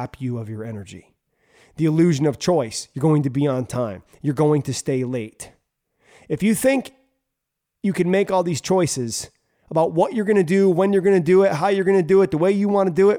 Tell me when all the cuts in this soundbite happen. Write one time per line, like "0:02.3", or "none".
none